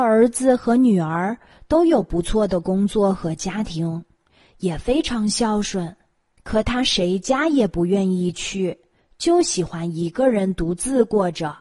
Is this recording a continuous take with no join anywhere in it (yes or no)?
yes